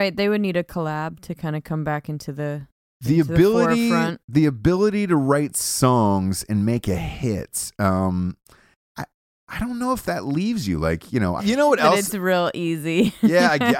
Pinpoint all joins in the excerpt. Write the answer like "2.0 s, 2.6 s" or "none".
11.4 s